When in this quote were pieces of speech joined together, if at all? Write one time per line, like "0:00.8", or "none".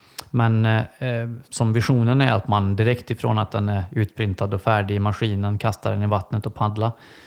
0:01.4